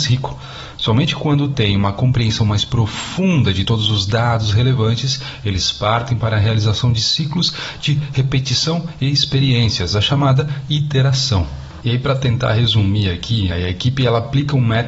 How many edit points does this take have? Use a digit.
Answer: 2